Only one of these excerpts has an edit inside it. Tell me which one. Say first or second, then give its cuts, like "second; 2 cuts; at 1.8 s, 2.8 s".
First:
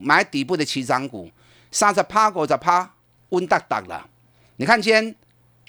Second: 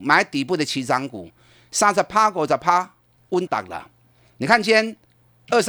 second; 1 cut; at 3.5 s